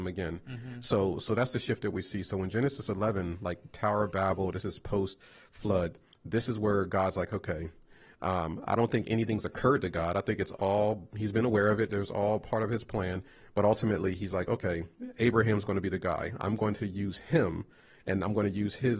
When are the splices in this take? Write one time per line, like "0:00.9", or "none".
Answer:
none